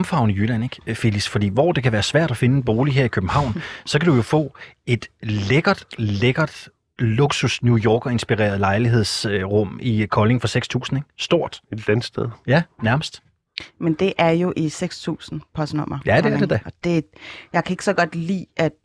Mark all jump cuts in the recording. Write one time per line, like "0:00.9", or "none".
none